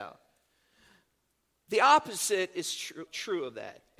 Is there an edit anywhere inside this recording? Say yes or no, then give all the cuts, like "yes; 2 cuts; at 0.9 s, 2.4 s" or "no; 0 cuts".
yes; 1 cut; at 3.1 s